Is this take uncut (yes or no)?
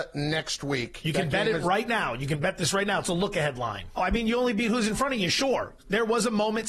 no